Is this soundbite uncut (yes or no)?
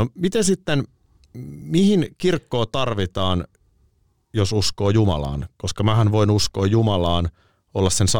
yes